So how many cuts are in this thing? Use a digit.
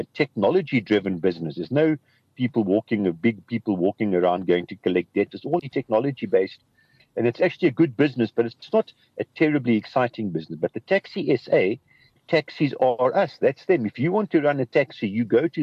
2